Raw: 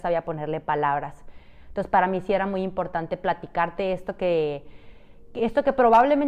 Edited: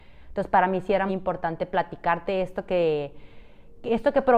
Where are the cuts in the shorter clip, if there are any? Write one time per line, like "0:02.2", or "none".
0:01.1